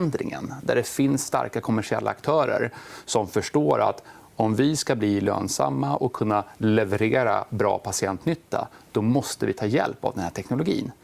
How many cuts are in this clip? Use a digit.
0